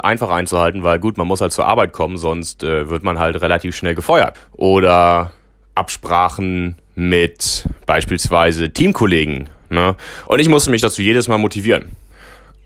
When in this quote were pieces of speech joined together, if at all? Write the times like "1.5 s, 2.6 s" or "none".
4.3 s, 10.3 s